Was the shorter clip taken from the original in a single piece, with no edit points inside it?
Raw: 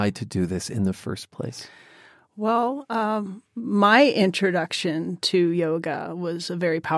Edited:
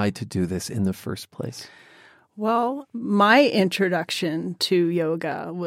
no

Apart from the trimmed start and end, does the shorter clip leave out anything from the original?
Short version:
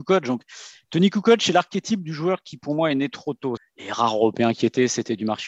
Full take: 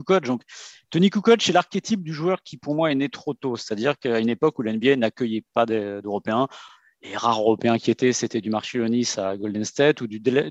yes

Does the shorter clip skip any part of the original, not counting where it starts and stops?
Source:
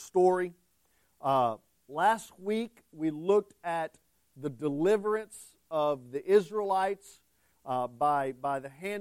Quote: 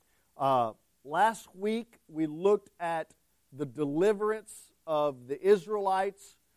no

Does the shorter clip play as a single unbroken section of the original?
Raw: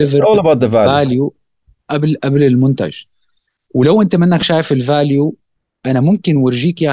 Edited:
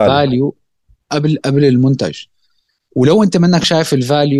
yes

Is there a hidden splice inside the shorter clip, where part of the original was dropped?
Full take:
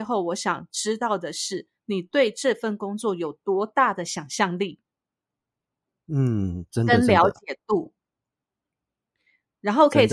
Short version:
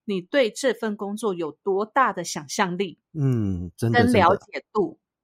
yes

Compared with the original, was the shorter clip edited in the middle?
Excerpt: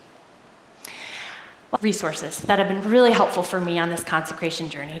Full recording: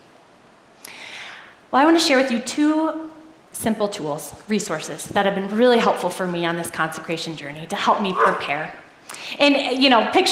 yes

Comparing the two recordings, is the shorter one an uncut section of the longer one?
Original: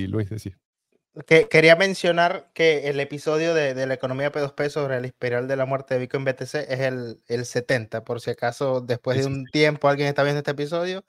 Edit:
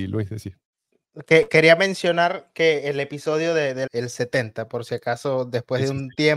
no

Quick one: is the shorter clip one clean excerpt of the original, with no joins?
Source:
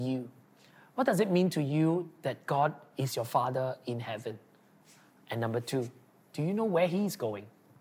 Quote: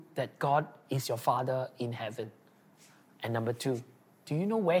yes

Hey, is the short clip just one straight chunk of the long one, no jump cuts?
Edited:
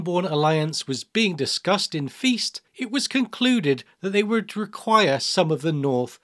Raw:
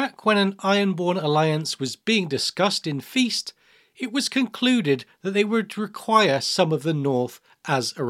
no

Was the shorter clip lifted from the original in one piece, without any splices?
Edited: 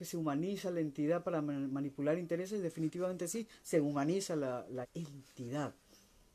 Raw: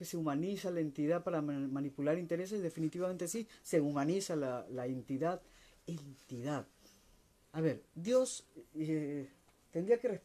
no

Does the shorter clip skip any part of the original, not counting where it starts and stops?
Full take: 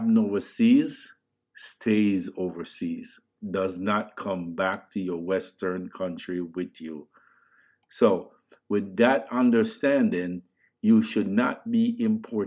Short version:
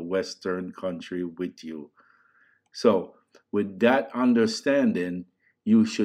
no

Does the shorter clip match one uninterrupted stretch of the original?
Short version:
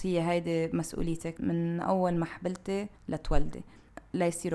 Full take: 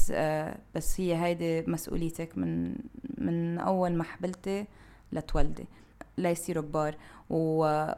no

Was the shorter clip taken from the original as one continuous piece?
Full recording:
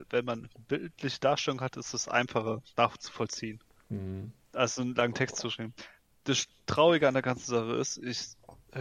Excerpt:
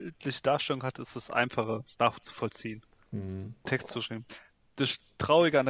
no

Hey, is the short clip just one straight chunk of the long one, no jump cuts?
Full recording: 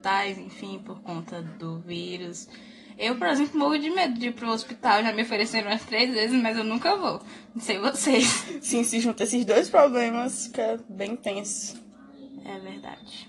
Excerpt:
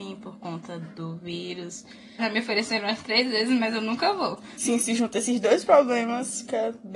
no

